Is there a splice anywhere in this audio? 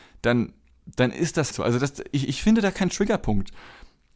yes; 1 cut; at 1.5 s

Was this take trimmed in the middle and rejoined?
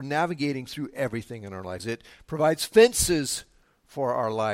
yes; 1 cut; at 1.8 s

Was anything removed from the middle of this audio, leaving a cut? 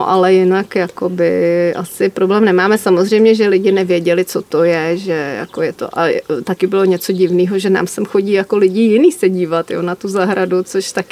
no; 0 cuts

